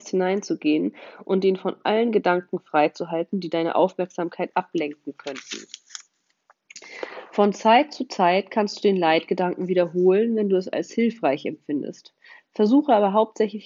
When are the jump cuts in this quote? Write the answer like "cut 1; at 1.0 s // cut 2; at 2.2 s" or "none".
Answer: none